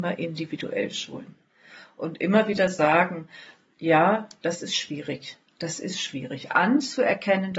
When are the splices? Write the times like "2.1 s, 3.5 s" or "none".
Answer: none